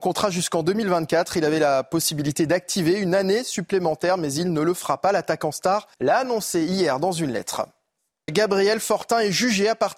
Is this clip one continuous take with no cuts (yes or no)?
no